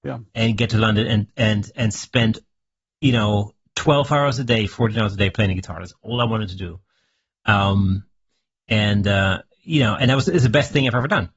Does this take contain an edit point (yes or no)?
no